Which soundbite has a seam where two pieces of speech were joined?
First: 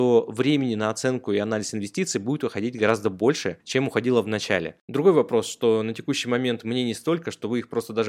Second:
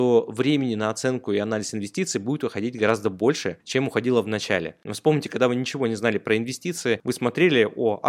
first; 1 cut; at 4.8 s

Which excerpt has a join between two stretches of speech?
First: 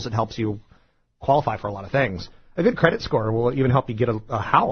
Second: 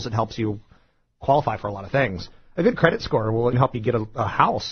second; 1 cut; at 3.5 s

